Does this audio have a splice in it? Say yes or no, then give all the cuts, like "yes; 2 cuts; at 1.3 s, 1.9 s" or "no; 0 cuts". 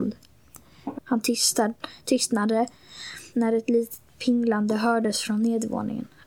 yes; 2 cuts; at 0.9 s, 3.3 s